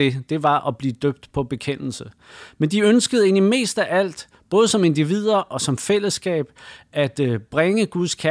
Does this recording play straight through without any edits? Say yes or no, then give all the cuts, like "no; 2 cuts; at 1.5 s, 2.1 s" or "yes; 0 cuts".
yes; 0 cuts